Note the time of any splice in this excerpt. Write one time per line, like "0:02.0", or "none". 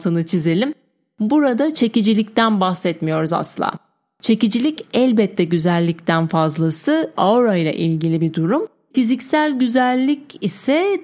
0:07.2
0:08.9